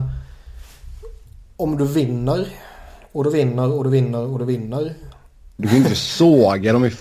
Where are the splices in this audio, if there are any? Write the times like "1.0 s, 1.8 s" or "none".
5.6 s